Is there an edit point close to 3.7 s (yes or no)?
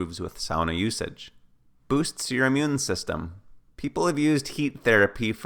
yes